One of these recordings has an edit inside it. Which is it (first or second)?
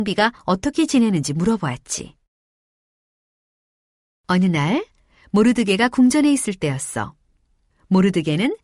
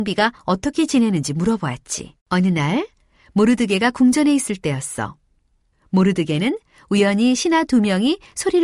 second